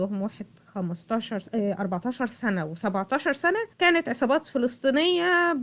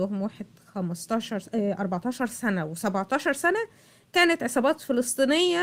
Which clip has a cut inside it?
first; 1 cut; at 3.7 s

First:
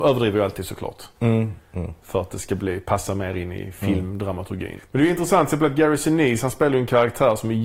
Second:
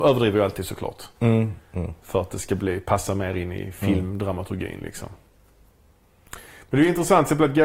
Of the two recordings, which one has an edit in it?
first; 1 cut; at 4.8 s

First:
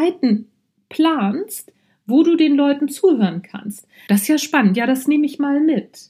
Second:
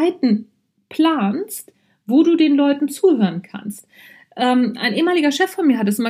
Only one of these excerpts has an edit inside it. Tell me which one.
first; 1 cut; at 4.1 s

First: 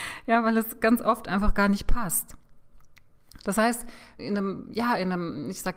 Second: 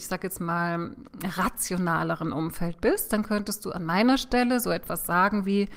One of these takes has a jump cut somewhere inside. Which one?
first; 1 cut; at 4.2 s

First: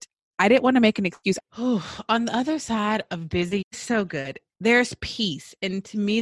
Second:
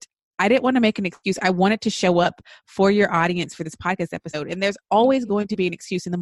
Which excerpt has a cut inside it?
first; 2 cuts; at 1.4 s, 3.6 s

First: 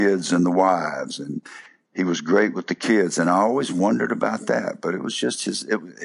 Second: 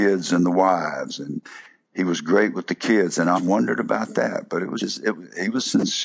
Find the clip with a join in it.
second; 2 cuts; at 3.4 s, 4.8 s

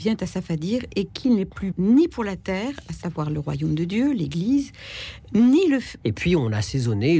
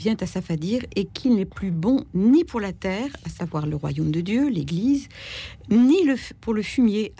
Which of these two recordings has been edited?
first; 2 cuts; at 1.7 s, 6.0 s

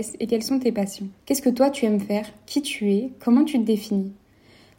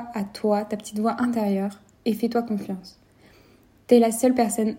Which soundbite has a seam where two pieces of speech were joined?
first; 1 cut; at 1.2 s

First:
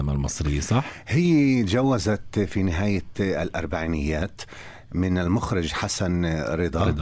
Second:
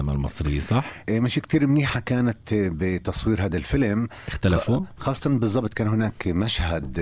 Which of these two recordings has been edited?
second; 1 cut; at 1.0 s

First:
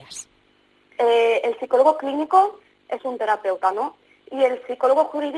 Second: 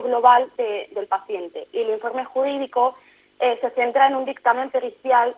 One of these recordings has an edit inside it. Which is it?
first; 2 cuts; at 0.9 s, 3.0 s

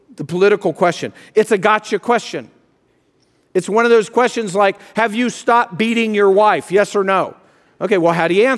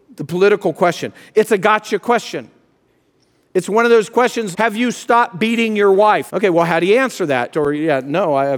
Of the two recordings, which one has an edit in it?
second; 3 cuts; at 4.5 s, 6.3 s, 7.5 s

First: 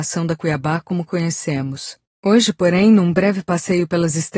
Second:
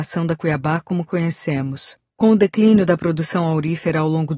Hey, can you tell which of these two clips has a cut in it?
first; 1 cut; at 2.1 s

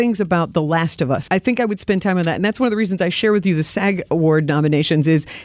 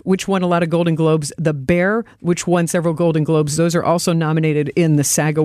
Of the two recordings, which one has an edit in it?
first; 1 cut; at 1.3 s

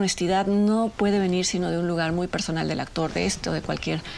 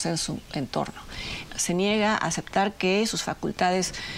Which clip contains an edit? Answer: second; 1 cut; at 1.5 s

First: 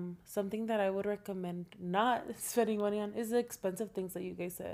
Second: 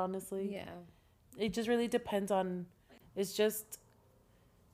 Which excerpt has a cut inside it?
second; 2 cuts; at 1.3 s, 3.0 s

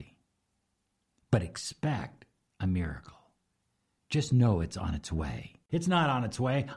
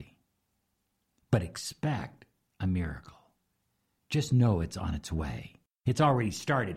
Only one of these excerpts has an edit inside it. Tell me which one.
first; 1 cut; at 5.7 s

